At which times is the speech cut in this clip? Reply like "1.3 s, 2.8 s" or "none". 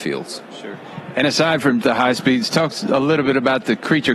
1.8 s